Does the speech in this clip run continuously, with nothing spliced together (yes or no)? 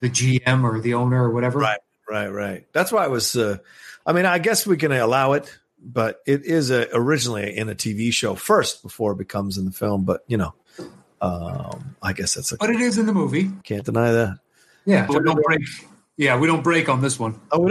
no